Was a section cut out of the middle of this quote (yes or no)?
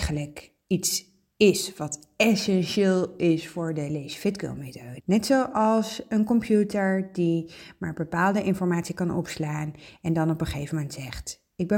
yes